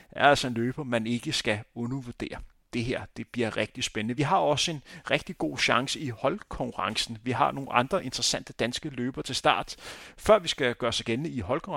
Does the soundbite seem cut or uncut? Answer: uncut